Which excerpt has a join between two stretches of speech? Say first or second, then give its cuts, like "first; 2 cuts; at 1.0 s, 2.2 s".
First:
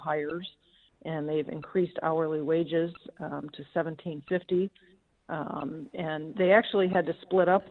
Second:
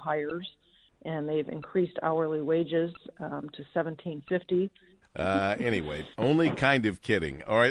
second; 2 cuts; at 5.0 s, 6.1 s